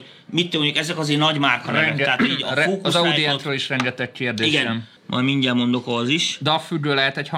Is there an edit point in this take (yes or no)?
yes